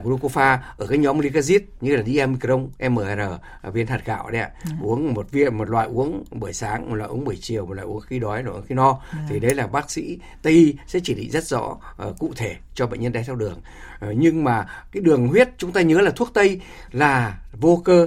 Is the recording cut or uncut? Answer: uncut